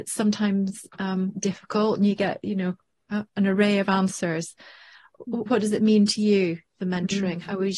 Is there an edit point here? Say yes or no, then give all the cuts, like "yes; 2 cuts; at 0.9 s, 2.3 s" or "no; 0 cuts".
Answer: no; 0 cuts